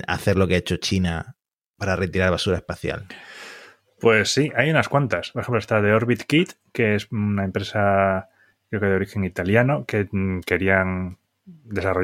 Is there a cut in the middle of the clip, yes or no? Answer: no